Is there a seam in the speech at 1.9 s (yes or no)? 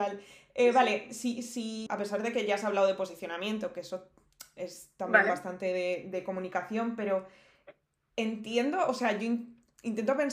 yes